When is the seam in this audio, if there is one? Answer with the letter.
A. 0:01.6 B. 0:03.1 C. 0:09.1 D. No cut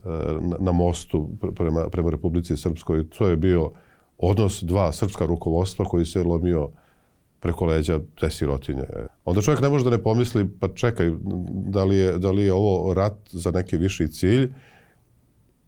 C